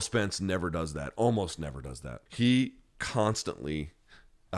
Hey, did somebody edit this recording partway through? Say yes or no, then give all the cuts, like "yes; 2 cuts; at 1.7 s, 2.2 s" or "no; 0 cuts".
yes; 1 cut; at 2.3 s